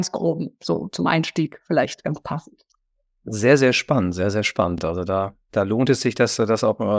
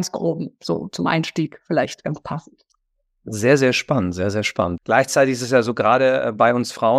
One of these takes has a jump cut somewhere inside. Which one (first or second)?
second